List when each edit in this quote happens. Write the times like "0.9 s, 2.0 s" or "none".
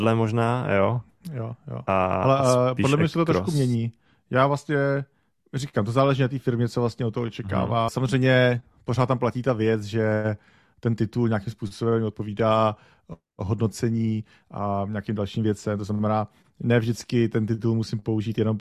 7.9 s

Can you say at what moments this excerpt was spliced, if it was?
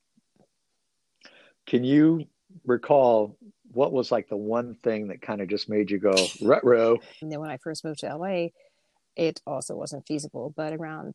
7.2 s

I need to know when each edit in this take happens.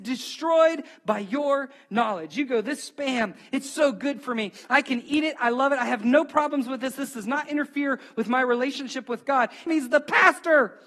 9.7 s

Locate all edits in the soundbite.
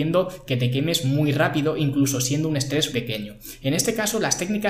2.9 s

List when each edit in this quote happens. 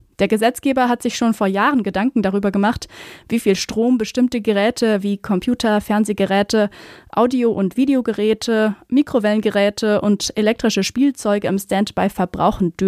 none

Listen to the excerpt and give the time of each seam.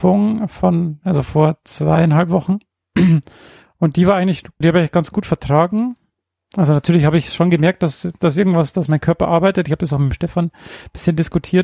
4.6 s, 8.2 s

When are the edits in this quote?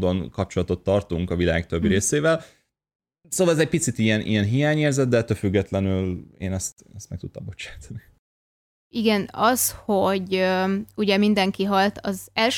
none

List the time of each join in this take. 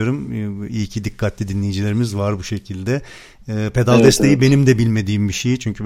none

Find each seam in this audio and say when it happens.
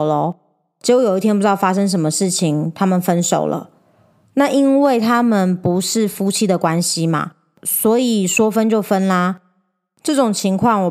none

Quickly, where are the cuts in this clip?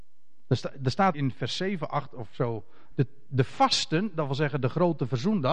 1.1 s, 2.9 s

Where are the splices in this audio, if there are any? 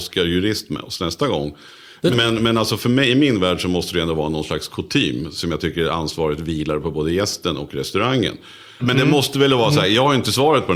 2.1 s, 8.8 s

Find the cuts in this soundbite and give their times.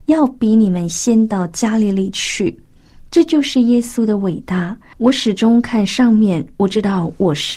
4.9 s

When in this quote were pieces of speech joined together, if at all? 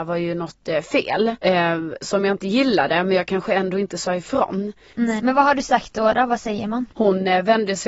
5.2 s, 6.9 s

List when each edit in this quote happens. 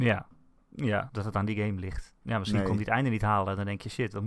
1.1 s

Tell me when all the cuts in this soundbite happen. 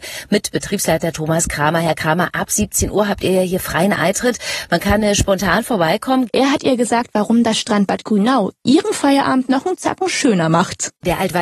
6.3 s

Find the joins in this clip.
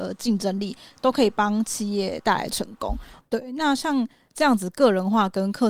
3.2 s

